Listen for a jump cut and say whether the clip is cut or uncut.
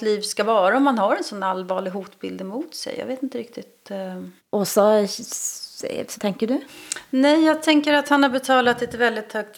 cut